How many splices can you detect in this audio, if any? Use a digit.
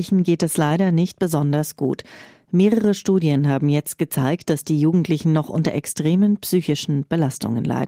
0